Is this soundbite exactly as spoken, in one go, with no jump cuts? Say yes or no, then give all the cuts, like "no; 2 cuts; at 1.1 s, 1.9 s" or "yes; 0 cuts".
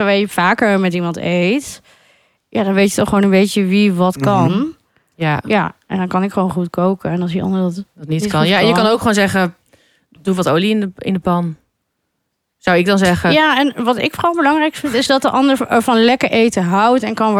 yes; 0 cuts